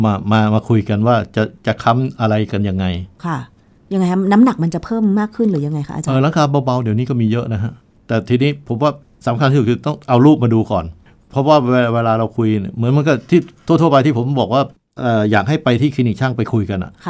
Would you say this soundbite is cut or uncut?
uncut